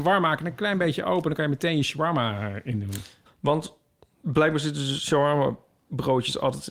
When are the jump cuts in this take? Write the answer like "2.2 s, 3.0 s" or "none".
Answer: 3.3 s